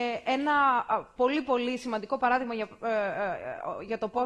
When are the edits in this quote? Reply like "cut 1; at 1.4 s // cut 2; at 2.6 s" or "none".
none